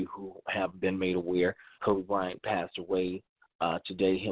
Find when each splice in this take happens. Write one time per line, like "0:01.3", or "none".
0:01.8